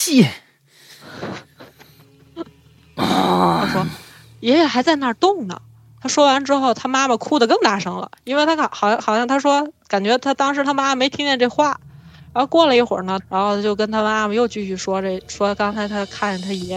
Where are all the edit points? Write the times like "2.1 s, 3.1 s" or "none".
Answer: 13.2 s